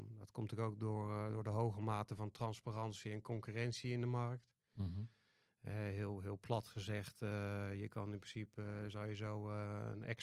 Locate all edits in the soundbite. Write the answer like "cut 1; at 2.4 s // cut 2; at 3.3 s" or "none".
none